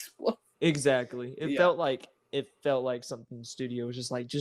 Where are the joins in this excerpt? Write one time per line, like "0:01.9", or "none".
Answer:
none